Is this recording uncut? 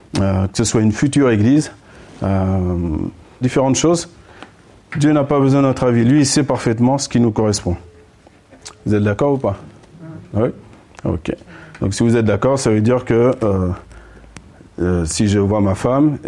no; 1 cut; at 3.4 s

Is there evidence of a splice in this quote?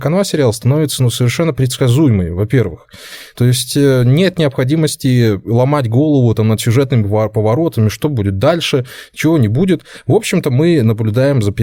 no; 0 cuts

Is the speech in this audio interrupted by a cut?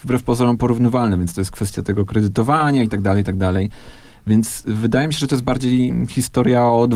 no; 0 cuts

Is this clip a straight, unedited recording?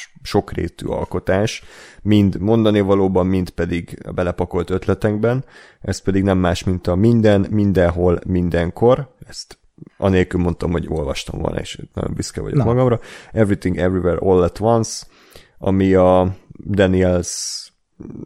yes; 0 cuts

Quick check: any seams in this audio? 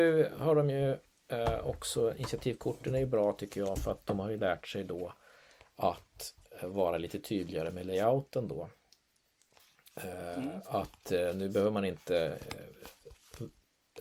no; 0 cuts

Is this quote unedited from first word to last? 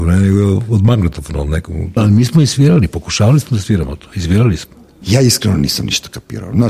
no; 2 cuts; at 2.0 s, 5.0 s

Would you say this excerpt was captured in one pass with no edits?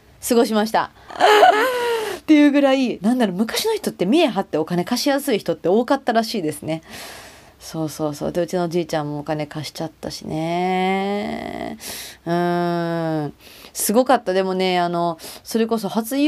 no; 1 cut; at 1.1 s

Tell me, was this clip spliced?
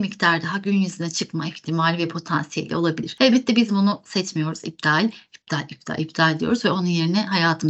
no; 0 cuts

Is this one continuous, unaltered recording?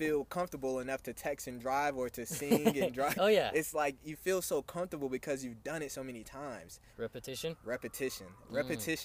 no; 2 cuts; at 3.1 s, 6.9 s

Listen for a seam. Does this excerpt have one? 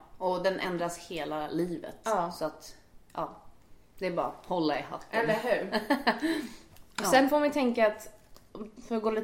no; 0 cuts

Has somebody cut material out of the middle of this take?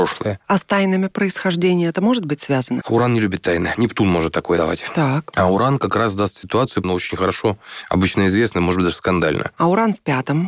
yes; 2 cuts; at 2.8 s, 6.8 s

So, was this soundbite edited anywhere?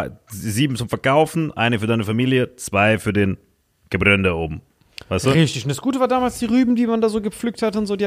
no; 0 cuts

